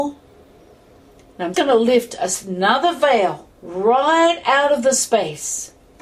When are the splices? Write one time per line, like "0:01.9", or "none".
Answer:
0:01.5
0:03.6